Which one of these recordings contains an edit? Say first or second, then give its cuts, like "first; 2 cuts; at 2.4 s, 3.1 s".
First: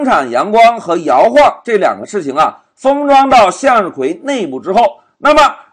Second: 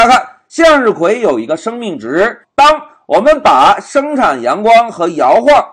second; 1 cut; at 2.4 s